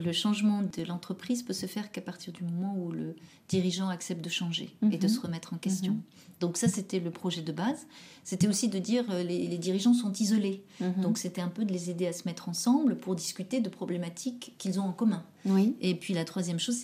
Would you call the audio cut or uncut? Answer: uncut